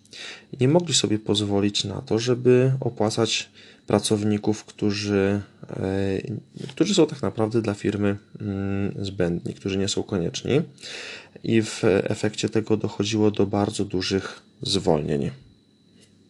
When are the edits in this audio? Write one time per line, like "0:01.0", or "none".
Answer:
none